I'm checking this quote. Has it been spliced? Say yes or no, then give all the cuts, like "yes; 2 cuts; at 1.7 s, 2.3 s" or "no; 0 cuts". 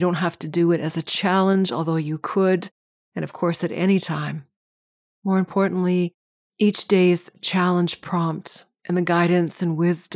no; 0 cuts